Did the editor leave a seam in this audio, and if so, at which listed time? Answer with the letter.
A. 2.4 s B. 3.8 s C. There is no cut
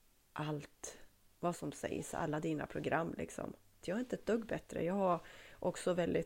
B